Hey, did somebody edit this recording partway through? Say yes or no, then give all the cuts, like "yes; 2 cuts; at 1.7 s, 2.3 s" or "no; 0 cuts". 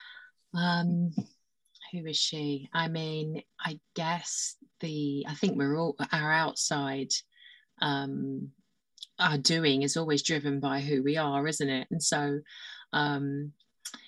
no; 0 cuts